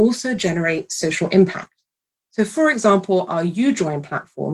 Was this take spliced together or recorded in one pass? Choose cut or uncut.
uncut